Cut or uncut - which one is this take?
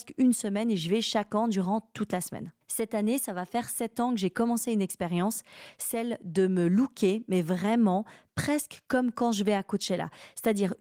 cut